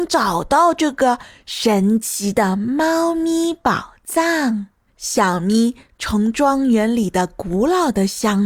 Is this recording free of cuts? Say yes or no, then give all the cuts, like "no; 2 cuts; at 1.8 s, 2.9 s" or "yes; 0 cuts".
no; 1 cut; at 4.9 s